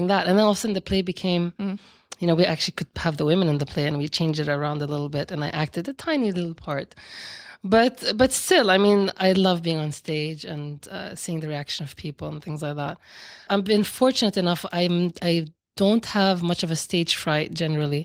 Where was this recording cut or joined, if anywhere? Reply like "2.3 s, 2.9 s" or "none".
13.5 s